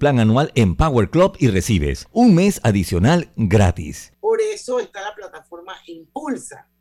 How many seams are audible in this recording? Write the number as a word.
one